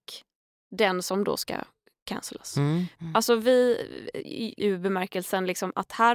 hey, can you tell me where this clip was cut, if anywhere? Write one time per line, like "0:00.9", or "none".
0:03.0
0:04.6